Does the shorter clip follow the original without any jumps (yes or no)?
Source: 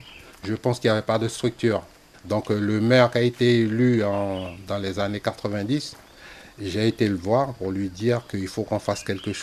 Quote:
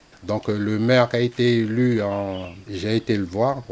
no